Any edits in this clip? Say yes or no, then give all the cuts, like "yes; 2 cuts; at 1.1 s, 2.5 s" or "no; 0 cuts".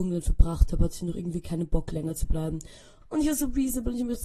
yes; 1 cut; at 3.0 s